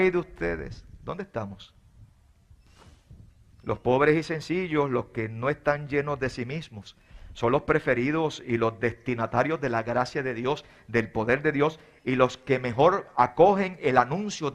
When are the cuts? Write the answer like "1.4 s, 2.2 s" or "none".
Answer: none